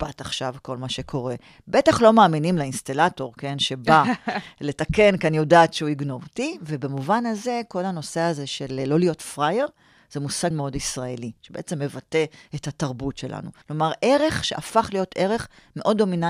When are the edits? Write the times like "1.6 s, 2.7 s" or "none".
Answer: 10.5 s, 13.6 s